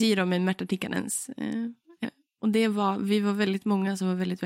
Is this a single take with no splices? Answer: no; 1 cut; at 2.0 s

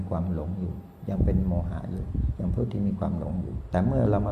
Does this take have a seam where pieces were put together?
no; 0 cuts

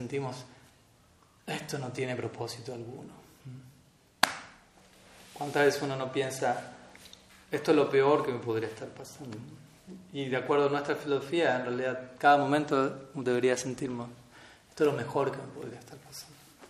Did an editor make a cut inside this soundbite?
no; 0 cuts

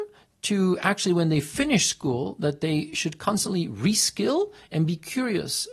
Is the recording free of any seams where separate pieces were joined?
yes; 0 cuts

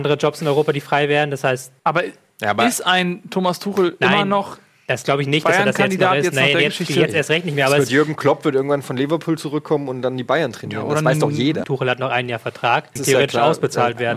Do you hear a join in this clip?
yes; 3 cuts; at 1.8 s, 11.6 s, 13.0 s

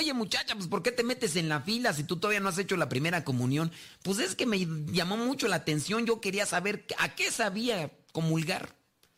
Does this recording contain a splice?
no; 0 cuts

